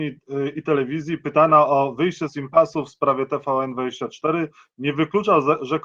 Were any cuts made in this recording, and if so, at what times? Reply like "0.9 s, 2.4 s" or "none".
none